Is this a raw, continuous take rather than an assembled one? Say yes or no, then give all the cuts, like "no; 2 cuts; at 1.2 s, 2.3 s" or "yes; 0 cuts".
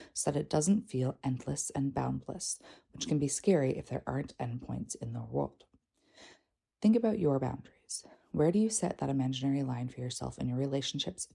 yes; 0 cuts